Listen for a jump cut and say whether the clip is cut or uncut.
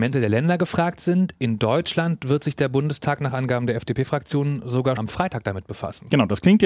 cut